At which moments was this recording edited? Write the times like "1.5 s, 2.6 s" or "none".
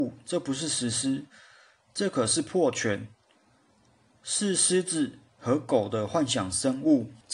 none